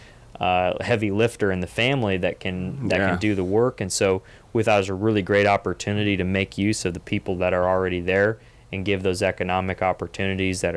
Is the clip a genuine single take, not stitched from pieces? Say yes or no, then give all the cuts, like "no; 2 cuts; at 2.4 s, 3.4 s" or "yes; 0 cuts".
yes; 0 cuts